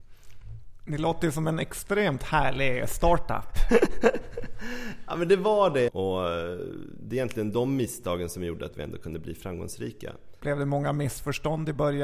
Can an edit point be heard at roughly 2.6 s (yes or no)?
no